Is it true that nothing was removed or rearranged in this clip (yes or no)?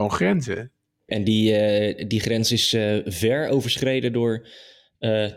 no